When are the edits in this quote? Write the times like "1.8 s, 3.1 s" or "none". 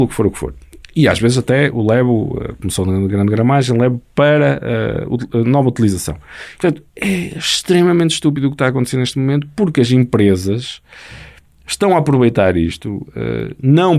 6.6 s

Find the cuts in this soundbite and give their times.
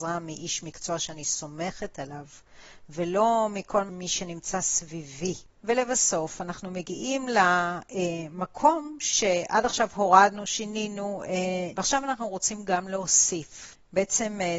5.5 s, 11.7 s

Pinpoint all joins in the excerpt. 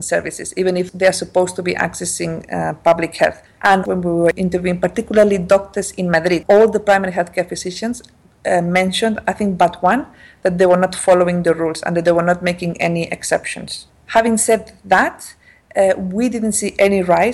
3.6 s, 13.9 s

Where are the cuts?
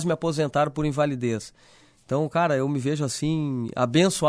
none

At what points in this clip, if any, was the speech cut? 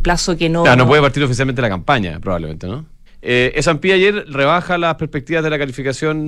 3.1 s

